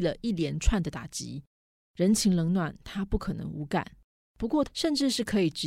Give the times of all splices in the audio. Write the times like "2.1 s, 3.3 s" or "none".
4.6 s